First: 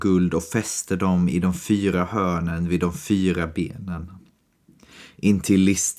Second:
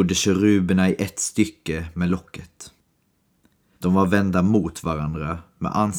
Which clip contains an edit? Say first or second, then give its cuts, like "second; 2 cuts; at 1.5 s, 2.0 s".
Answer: second; 1 cut; at 3.8 s